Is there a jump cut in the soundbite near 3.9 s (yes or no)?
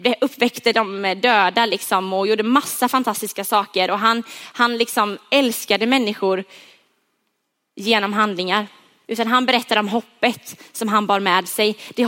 no